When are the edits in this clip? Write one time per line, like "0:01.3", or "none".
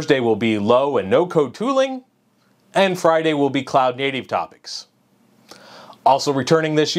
none